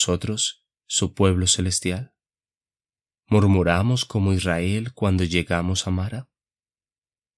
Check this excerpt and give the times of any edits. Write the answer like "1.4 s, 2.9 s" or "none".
none